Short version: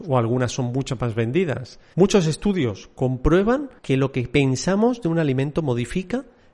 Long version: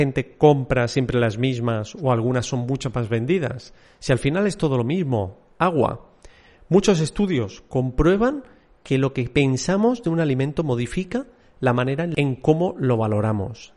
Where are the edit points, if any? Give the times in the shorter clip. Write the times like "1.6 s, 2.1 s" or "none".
1.9 s, 3.8 s